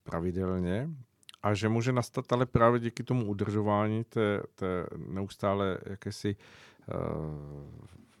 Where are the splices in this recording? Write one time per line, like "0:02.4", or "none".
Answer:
none